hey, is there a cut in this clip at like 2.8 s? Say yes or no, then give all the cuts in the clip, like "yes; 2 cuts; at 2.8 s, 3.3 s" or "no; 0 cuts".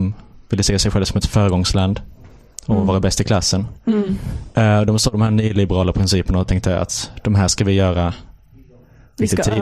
no; 0 cuts